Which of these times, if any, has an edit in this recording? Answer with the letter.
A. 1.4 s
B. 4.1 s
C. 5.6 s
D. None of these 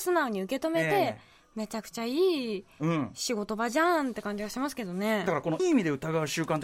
C